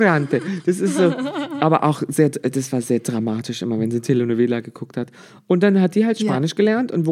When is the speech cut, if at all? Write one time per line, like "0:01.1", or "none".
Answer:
none